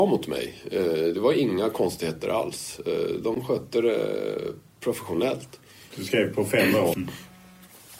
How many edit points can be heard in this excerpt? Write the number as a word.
two